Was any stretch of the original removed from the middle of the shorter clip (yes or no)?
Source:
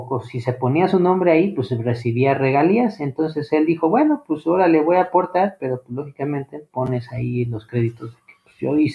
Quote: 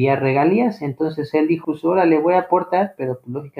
yes